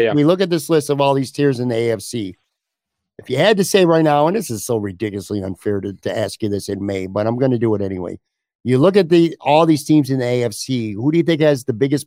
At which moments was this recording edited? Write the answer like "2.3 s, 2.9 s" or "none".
none